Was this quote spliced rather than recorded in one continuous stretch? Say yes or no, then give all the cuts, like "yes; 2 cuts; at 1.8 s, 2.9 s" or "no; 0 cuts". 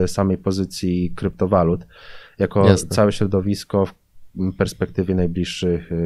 no; 0 cuts